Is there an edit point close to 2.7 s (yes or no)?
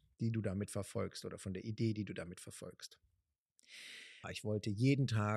no